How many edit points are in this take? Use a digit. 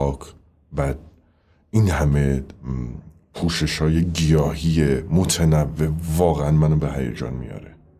0